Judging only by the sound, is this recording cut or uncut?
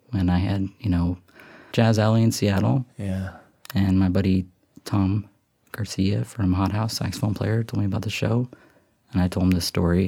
cut